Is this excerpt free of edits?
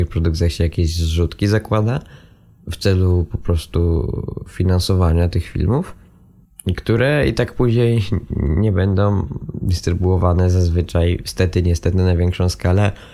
yes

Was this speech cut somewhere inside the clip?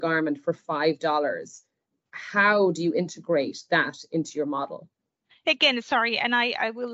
no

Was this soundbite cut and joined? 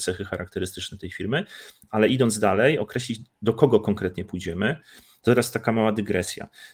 no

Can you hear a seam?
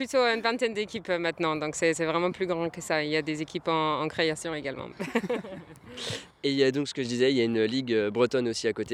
yes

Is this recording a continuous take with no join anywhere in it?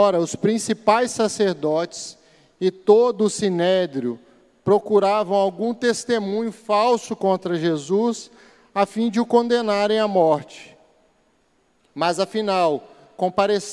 no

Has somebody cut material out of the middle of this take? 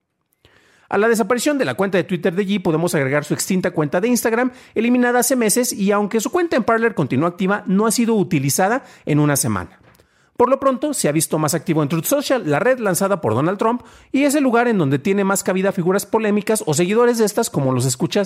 no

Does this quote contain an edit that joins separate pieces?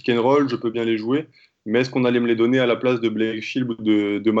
no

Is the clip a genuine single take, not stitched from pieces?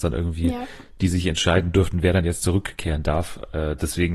yes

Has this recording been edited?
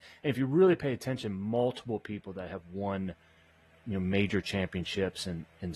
no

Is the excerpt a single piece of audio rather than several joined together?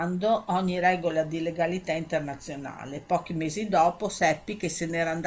yes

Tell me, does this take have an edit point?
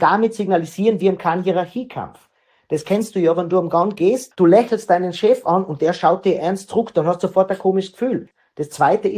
no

